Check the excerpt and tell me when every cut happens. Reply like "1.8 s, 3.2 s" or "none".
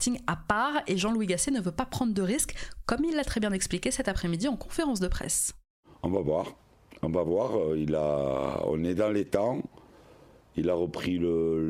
none